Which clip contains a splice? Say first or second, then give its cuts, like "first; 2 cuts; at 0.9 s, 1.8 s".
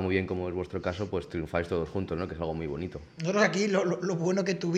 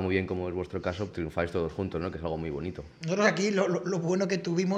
second; 1 cut; at 1.1 s